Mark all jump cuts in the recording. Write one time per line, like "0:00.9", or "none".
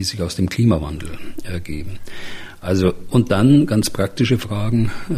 none